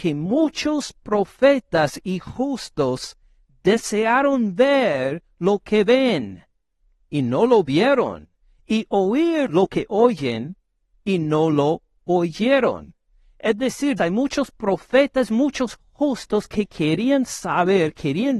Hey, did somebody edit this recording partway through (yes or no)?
yes